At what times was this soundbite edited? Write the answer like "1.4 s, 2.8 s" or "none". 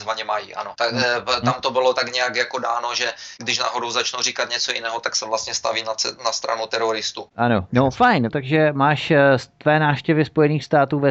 7.7 s

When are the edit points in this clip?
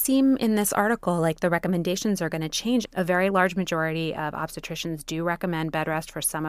2.8 s

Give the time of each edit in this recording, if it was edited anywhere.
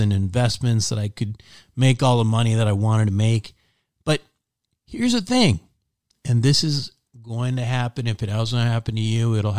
none

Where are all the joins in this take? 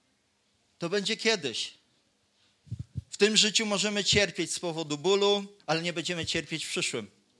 3.1 s, 5.6 s

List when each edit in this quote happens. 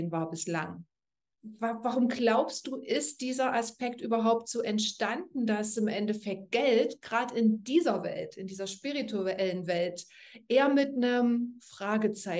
1.3 s

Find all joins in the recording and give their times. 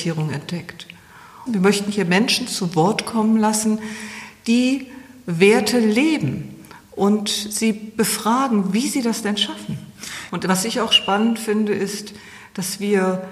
1.5 s, 10.3 s

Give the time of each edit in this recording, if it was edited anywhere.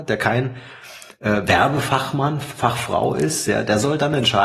none

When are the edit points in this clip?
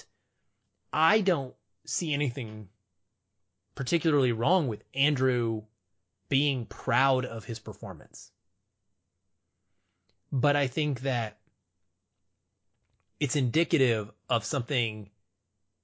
none

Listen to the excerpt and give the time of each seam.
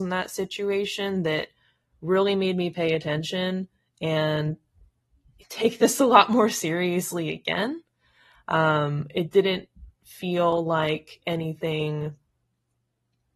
none

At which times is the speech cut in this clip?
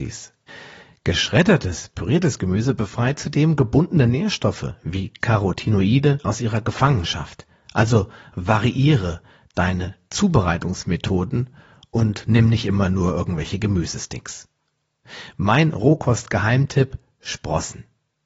none

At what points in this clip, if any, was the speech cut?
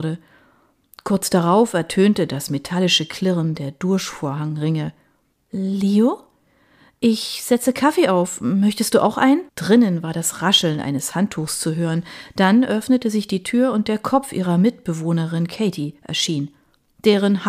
5.3 s, 9.5 s

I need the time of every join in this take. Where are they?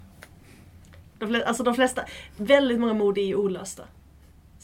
1.2 s

